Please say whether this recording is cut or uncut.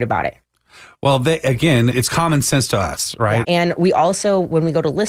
cut